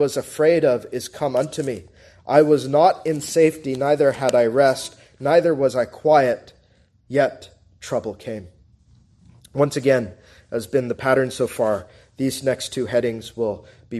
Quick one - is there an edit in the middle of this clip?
yes; 1 cut; at 9.4 s

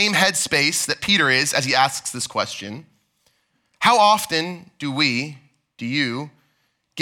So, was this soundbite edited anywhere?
no; 0 cuts

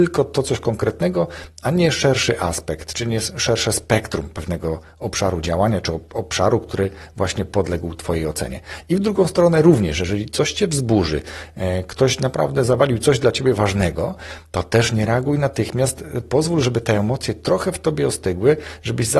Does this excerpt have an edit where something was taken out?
no; 0 cuts

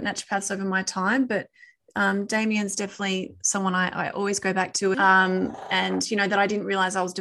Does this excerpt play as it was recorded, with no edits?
no; 1 cut; at 4.9 s

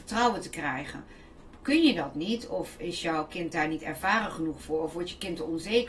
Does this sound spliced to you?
no; 0 cuts

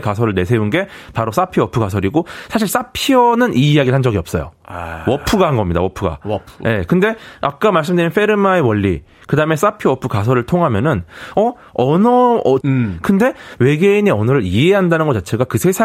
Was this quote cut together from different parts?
yes; 1 cut; at 12.6 s

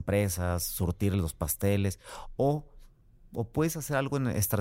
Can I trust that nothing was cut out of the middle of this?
yes; 0 cuts

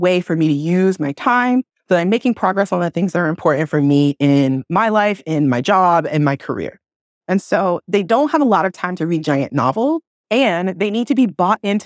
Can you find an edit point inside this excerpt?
no; 0 cuts

